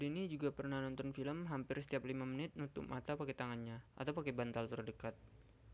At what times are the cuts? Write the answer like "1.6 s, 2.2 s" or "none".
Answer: 3.9 s